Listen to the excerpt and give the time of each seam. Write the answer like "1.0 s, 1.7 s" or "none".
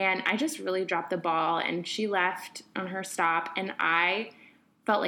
none